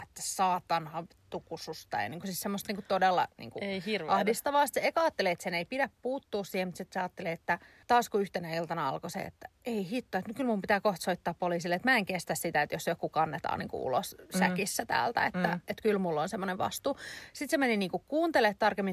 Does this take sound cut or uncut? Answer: uncut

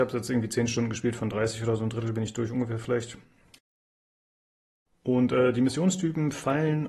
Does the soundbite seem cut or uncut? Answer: uncut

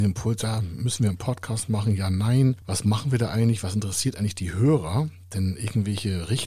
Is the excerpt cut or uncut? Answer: uncut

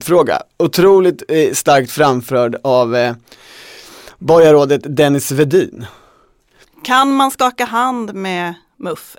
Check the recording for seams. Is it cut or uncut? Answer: uncut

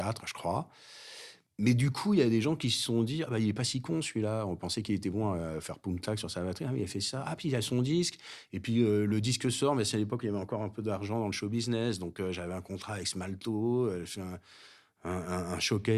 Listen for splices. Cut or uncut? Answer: uncut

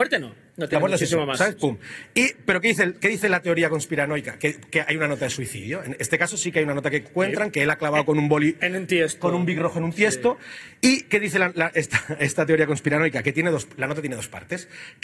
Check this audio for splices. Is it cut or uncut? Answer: uncut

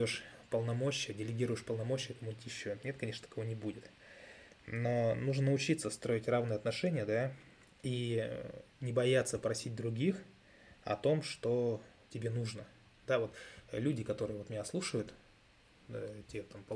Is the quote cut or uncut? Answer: uncut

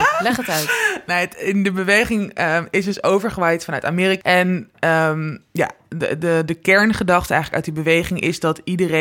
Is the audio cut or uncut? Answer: cut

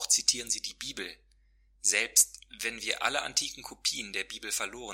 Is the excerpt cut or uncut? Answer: uncut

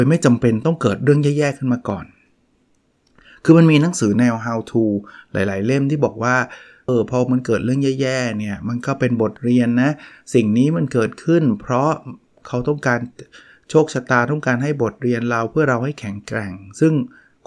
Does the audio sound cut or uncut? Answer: cut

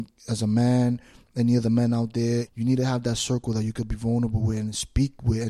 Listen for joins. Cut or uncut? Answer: cut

